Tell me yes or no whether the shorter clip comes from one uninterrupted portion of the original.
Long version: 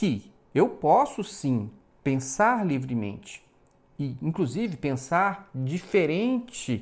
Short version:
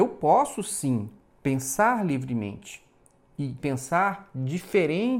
no